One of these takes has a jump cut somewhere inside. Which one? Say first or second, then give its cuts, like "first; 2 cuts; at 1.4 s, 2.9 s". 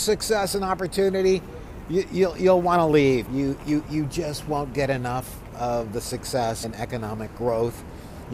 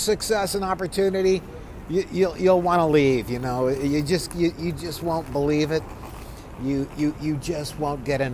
first; 2 cuts; at 3.2 s, 6.6 s